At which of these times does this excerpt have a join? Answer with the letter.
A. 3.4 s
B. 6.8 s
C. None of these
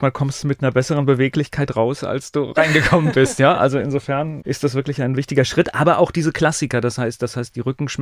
C